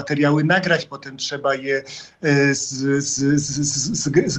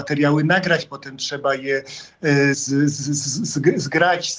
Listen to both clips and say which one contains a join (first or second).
second